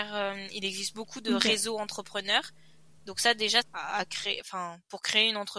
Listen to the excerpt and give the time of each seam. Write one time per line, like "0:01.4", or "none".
0:03.6